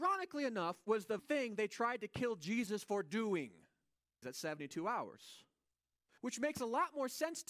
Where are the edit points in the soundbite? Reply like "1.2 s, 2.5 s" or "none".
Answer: 1.2 s, 4.2 s, 6.2 s